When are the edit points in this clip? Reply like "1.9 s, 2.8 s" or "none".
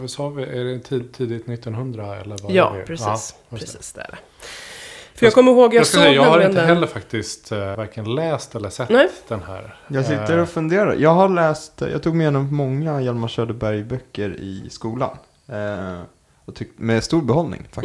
7.7 s